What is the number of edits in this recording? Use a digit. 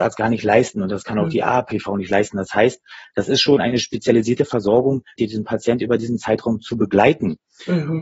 1